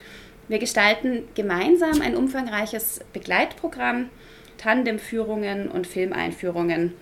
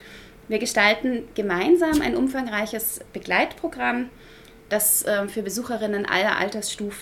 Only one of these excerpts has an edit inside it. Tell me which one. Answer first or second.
first